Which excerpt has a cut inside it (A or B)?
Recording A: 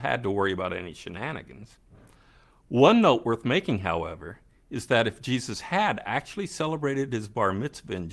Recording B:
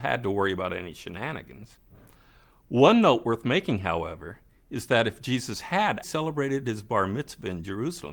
B